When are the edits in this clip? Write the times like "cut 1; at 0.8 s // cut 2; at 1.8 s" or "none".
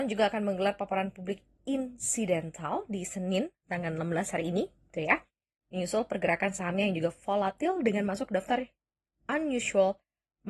none